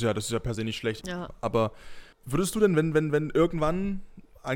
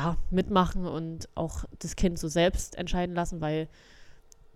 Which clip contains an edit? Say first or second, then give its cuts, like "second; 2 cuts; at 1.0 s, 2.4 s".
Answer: first; 2 cuts; at 1.0 s, 2.1 s